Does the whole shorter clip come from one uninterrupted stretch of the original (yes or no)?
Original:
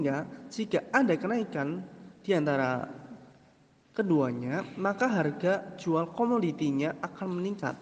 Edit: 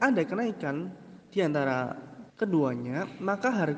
no